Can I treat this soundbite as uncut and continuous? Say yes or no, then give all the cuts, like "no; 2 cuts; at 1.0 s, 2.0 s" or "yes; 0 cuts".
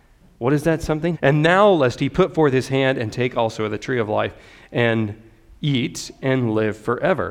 no; 1 cut; at 1.1 s